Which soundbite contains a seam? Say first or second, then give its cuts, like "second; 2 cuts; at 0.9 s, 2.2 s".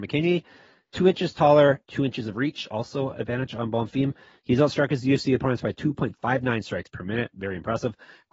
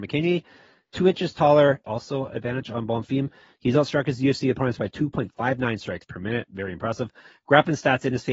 second; 1 cut; at 1.8 s